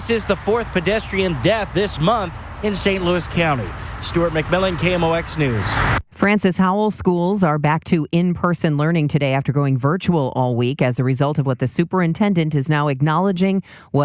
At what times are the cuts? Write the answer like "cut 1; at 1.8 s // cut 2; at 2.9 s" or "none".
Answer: none